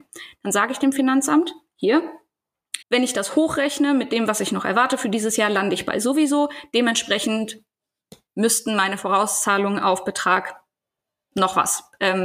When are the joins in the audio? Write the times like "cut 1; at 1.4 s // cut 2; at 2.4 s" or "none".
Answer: cut 1; at 2.8 s